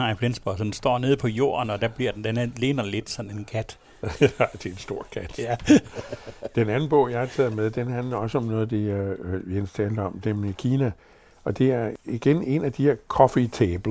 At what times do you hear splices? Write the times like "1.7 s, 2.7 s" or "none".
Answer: none